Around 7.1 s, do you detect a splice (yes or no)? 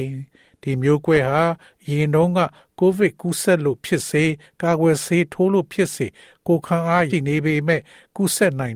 yes